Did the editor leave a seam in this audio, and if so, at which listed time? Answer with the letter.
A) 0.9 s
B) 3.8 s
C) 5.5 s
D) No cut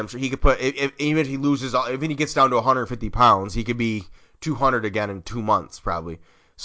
D